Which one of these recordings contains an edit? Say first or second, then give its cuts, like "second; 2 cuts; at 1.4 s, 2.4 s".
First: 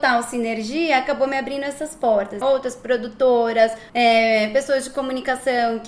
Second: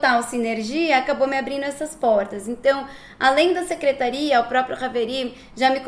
first; 2 cuts; at 2.4 s, 3.9 s